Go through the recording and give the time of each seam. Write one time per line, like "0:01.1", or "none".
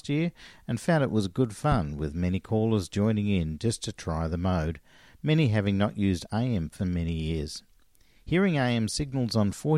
0:06.8